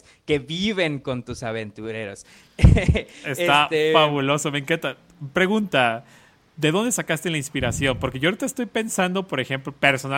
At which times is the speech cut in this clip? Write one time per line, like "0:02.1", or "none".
none